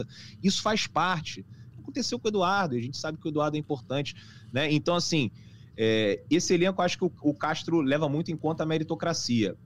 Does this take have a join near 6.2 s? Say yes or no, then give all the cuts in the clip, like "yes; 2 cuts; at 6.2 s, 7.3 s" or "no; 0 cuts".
no; 1 cut; at 1.7 s